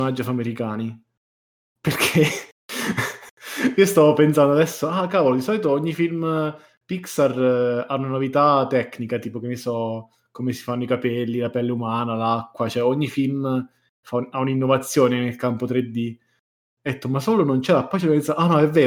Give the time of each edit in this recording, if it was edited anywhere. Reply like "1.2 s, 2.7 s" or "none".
2.5 s